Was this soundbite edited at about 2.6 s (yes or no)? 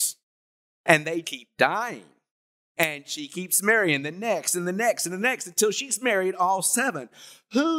no